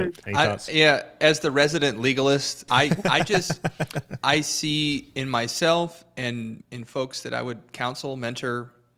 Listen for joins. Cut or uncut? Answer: cut